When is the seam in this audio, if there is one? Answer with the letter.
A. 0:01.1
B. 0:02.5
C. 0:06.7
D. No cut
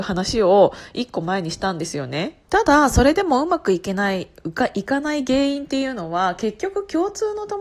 B